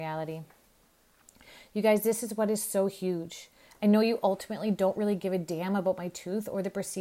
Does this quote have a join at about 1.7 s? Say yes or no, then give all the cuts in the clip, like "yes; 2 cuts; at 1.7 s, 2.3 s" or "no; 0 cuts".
no; 0 cuts